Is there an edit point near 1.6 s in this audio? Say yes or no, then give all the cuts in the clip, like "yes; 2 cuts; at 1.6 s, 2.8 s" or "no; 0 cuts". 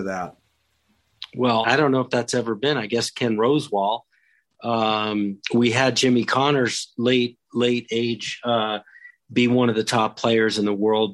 yes; 1 cut; at 1.6 s